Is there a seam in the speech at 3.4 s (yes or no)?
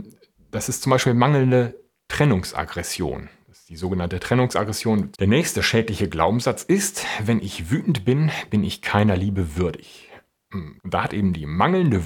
no